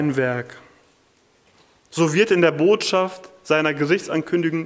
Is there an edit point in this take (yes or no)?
no